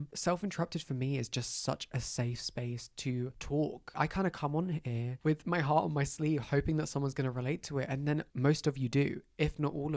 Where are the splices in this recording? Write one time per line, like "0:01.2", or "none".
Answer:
0:08.3